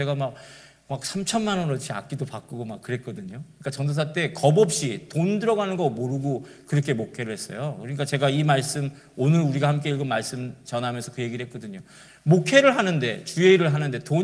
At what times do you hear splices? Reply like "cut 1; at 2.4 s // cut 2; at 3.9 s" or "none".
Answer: none